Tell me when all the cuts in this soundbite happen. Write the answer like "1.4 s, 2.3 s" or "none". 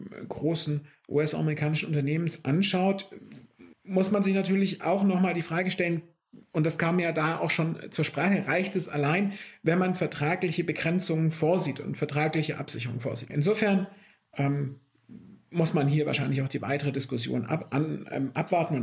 3.7 s, 13.3 s